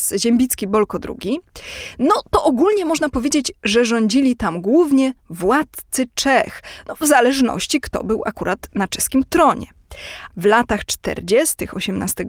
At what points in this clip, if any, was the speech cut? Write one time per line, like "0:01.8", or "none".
0:10.3